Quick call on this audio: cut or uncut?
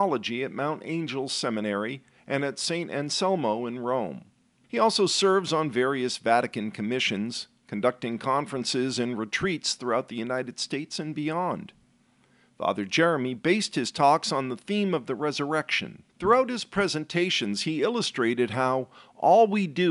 cut